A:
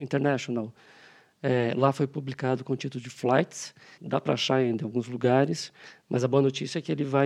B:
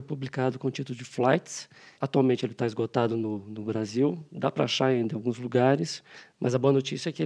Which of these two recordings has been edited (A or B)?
A